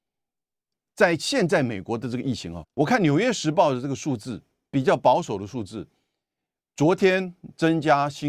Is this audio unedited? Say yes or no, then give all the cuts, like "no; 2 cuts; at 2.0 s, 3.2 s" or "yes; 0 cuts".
no; 1 cut; at 2.6 s